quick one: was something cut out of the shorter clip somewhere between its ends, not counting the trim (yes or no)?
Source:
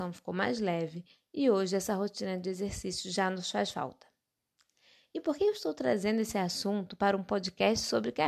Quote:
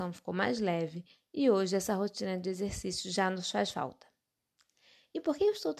no